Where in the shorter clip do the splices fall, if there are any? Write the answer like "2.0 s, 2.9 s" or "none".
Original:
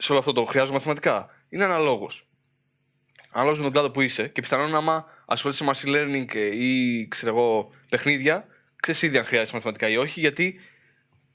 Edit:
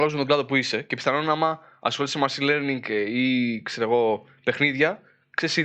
none